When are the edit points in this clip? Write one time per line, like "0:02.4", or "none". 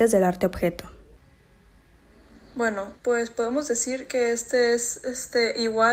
0:02.9